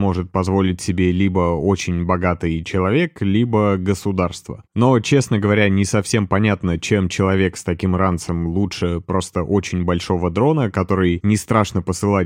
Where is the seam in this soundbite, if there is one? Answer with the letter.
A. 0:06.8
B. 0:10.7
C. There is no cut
C